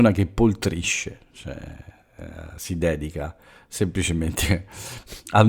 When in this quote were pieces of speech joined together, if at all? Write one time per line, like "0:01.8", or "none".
none